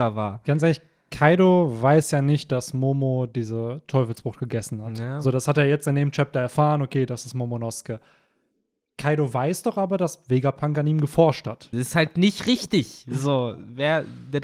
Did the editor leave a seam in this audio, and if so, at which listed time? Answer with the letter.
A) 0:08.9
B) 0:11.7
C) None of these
B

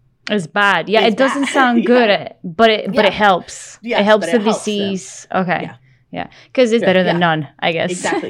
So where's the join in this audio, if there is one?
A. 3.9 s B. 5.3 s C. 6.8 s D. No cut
C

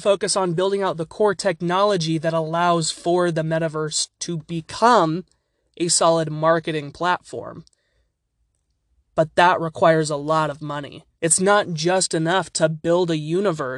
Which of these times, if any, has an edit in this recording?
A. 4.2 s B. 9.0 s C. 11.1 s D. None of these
C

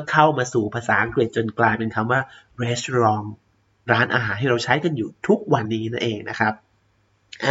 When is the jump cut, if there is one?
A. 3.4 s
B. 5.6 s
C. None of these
B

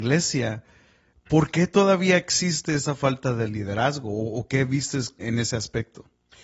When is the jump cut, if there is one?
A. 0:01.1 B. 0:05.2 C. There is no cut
B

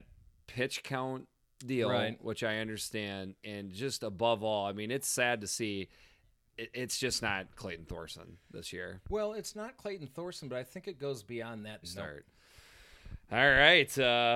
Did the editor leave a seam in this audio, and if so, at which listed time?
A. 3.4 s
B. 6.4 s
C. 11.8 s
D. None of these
C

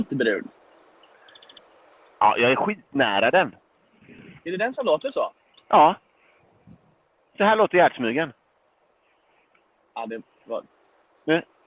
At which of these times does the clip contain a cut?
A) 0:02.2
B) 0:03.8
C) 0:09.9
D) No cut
A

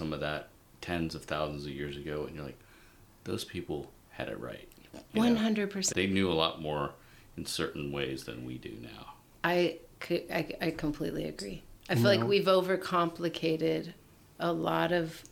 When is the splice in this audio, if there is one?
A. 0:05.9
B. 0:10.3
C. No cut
A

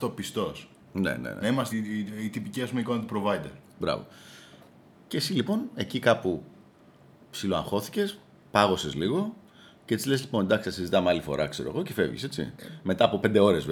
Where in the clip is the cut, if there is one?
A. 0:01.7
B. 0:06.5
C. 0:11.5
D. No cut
A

